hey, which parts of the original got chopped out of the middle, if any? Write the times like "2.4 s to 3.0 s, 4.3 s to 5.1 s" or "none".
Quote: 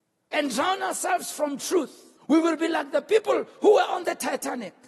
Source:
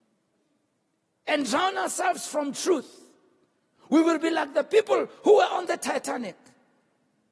3.1 s to 3.8 s